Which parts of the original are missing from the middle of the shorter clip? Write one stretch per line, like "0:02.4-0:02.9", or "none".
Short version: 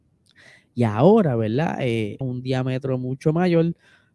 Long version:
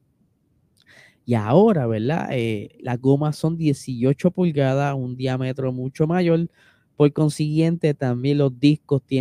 0:02.7-0:04.9